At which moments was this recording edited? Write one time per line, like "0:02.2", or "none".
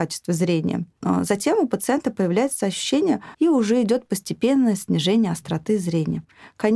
0:03.3